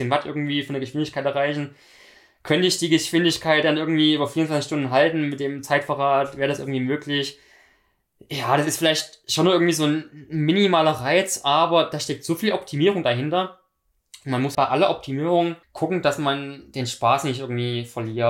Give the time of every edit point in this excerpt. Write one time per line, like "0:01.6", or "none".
0:14.5
0:15.6